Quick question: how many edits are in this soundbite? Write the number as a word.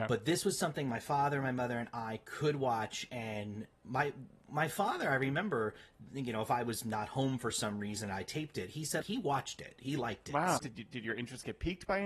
two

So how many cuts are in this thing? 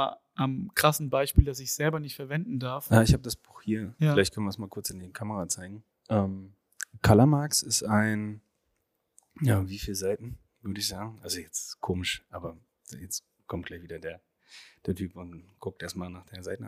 one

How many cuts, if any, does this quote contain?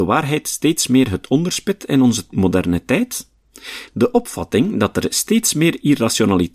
one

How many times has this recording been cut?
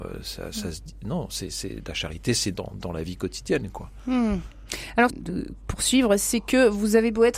two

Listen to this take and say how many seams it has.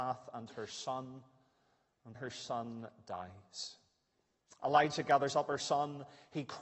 one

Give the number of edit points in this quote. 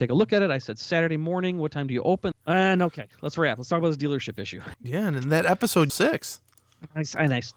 three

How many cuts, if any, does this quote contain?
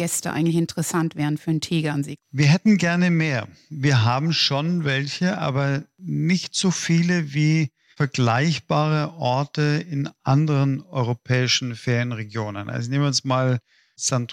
zero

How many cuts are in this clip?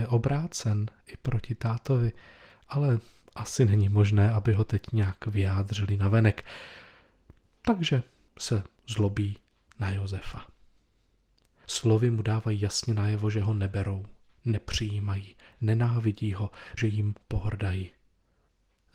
two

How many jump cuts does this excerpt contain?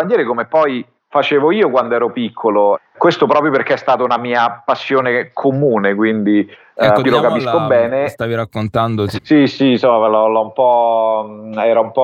two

